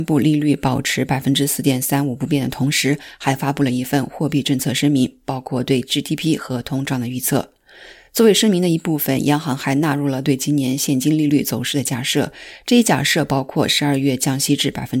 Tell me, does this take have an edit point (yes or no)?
no